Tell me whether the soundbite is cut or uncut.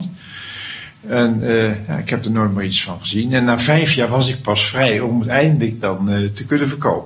uncut